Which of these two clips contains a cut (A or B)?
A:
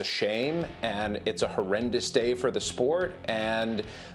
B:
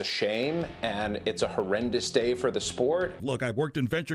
B